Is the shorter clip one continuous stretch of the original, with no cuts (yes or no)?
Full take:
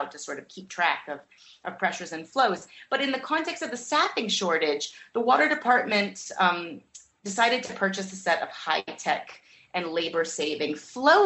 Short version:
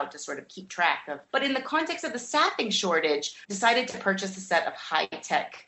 no